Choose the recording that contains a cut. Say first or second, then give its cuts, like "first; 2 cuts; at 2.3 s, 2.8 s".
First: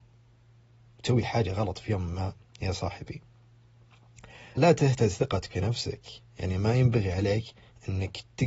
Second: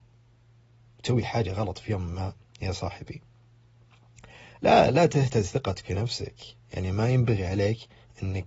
first; 1 cut; at 4.6 s